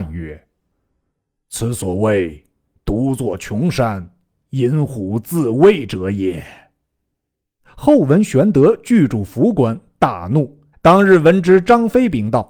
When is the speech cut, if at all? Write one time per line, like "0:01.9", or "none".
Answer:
0:10.7